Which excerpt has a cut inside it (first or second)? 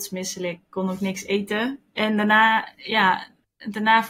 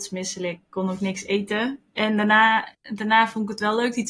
second